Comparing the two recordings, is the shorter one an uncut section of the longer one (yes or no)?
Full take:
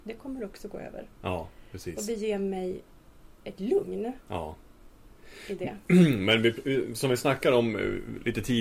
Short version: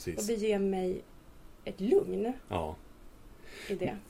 yes